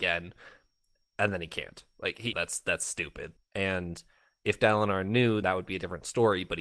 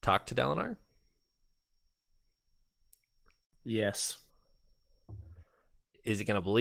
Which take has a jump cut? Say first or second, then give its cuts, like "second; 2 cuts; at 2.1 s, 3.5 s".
first; 3 cuts; at 2.3 s, 3.4 s, 5.4 s